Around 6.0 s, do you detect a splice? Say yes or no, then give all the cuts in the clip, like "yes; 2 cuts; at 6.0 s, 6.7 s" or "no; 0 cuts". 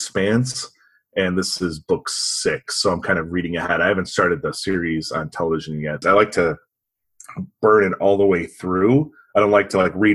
yes; 1 cut; at 6.0 s